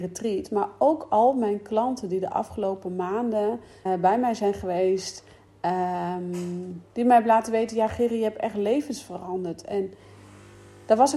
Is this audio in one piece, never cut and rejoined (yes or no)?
no